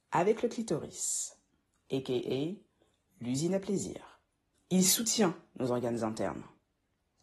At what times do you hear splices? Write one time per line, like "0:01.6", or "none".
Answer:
0:04.6